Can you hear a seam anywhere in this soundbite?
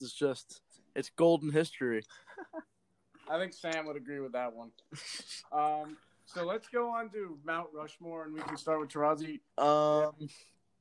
yes; 1 cut; at 9.5 s

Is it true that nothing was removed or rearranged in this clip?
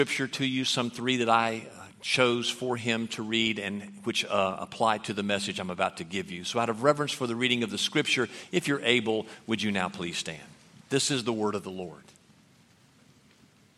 yes; 0 cuts

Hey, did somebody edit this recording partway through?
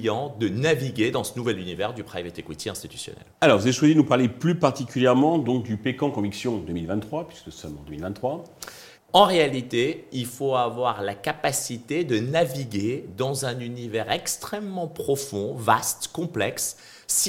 yes; 2 cuts; at 3.4 s, 8.9 s

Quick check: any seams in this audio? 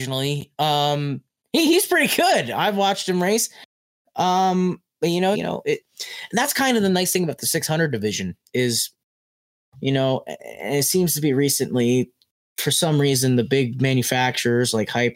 yes; 1 cut; at 5.3 s

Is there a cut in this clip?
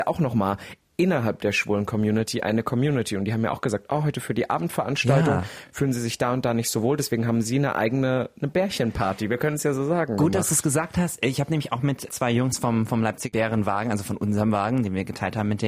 no; 0 cuts

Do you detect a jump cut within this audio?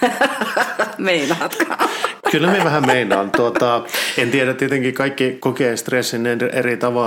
no; 0 cuts

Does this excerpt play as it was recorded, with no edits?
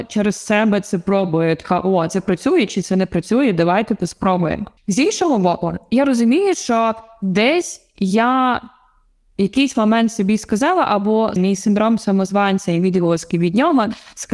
no; 2 cuts; at 4.8 s, 11.4 s

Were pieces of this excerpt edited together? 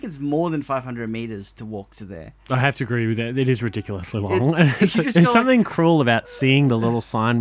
no; 0 cuts

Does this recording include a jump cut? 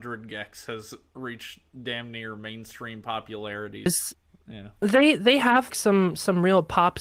yes; 2 cuts; at 3.9 s, 5.7 s

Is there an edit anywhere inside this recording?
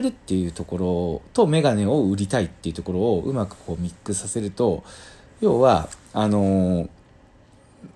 no; 0 cuts

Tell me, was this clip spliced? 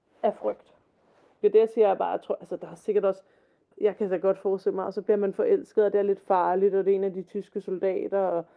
yes; 2 cuts; at 1.4 s, 3.7 s

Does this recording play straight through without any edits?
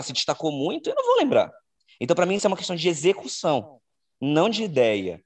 yes; 0 cuts

